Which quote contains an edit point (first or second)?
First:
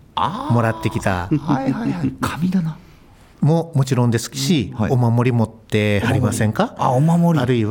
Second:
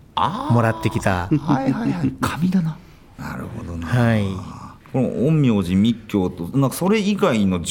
second